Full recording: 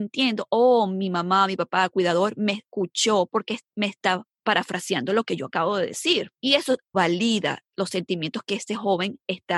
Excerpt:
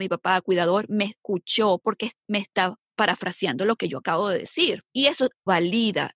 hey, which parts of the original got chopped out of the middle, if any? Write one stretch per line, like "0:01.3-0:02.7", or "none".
none